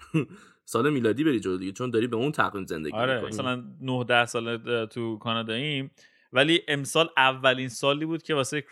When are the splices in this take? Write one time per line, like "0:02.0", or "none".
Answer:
0:03.3